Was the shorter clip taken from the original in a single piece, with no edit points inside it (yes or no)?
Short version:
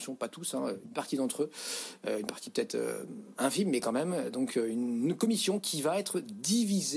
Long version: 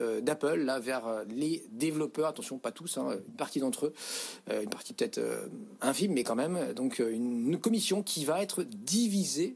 yes